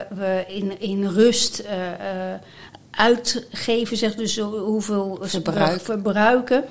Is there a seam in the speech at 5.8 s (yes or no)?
no